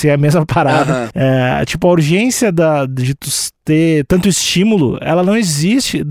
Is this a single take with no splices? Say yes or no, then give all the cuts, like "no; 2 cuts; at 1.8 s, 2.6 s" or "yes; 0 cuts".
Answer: yes; 0 cuts